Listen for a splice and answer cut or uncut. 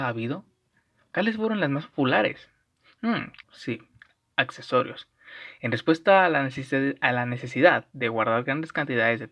cut